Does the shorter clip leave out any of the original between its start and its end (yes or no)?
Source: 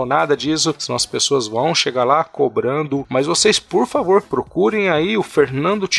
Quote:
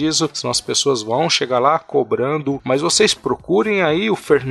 yes